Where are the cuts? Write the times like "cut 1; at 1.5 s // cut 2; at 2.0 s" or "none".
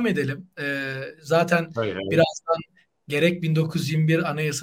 none